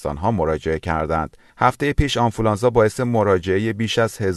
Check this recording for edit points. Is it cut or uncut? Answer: cut